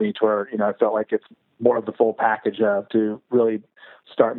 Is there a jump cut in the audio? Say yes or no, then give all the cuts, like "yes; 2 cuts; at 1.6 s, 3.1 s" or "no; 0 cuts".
no; 0 cuts